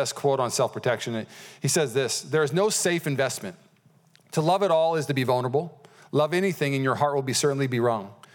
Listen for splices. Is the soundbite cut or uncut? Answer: uncut